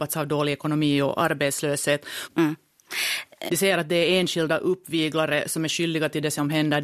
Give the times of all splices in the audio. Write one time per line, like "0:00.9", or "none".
0:02.2
0:03.5